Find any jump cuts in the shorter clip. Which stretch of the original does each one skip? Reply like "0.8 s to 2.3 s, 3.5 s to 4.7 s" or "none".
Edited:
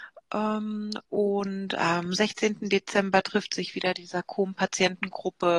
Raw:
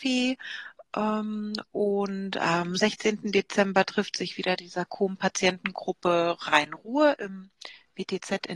none